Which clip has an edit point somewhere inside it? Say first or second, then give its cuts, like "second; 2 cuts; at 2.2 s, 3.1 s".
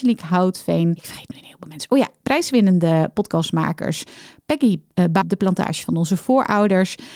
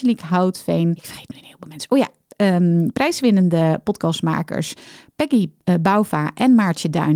first; 2 cuts; at 2.2 s, 5.2 s